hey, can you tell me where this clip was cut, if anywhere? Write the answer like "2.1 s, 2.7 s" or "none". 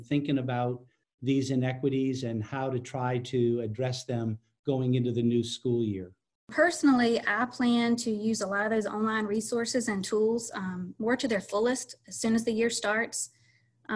none